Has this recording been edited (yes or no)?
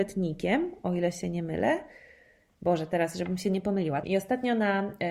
yes